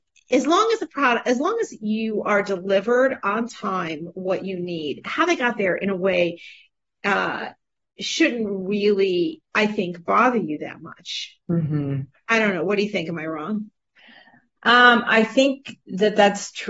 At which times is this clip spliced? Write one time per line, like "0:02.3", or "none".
none